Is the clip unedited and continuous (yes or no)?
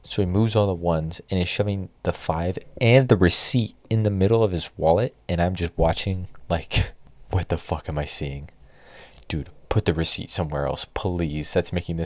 yes